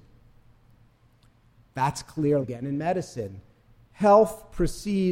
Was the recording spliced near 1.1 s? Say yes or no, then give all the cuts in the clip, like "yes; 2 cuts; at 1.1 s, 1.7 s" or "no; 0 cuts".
no; 1 cut; at 2.4 s